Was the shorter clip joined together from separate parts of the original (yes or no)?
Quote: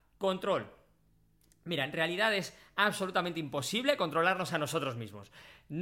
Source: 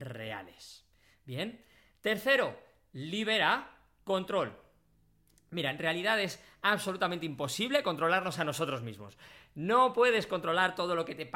no